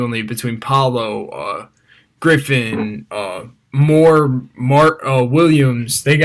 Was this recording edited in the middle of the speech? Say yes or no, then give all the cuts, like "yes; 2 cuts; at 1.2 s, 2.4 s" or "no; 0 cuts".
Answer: no; 0 cuts